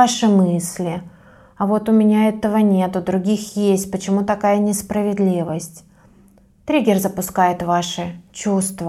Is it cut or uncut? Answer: uncut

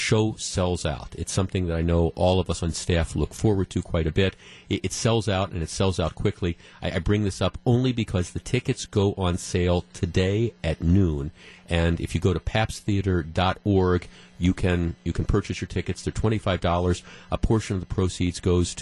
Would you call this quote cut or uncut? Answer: uncut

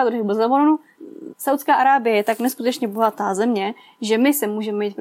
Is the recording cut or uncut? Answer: cut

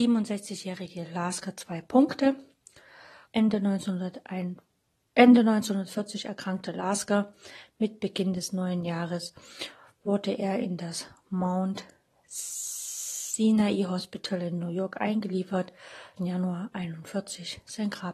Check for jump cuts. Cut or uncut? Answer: cut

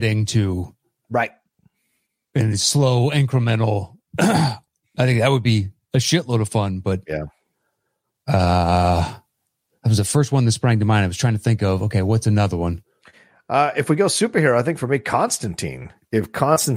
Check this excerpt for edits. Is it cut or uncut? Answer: uncut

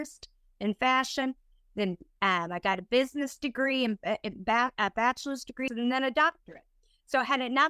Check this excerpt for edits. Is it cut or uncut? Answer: cut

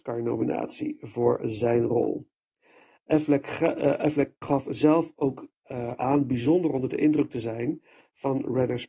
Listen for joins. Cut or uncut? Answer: cut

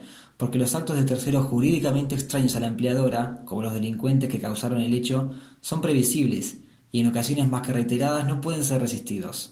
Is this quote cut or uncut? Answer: uncut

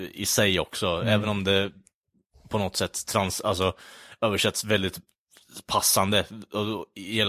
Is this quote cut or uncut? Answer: uncut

